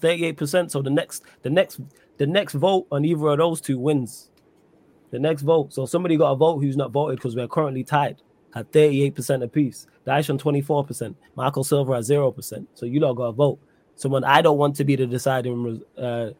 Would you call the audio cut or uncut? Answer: uncut